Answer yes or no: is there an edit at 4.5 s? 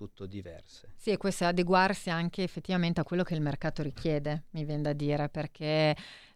no